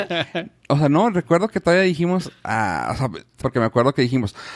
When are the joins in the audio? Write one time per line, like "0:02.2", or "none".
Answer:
0:03.4